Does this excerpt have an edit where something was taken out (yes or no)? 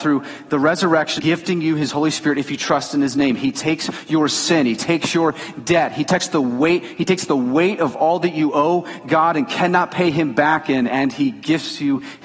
yes